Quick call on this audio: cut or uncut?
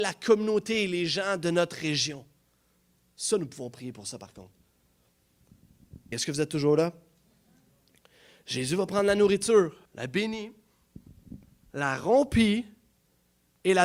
cut